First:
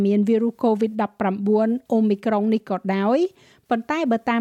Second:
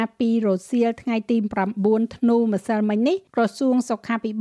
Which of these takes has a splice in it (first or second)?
second